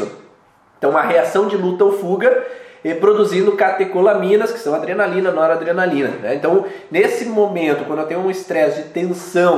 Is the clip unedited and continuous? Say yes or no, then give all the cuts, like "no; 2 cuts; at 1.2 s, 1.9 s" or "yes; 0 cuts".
yes; 0 cuts